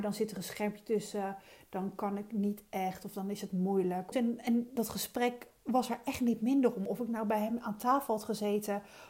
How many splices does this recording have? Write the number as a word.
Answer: one